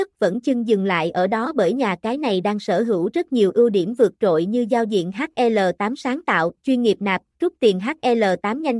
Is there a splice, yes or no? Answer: no